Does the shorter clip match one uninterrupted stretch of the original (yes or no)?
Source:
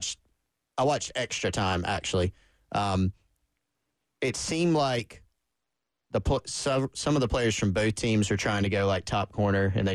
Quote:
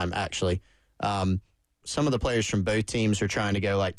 no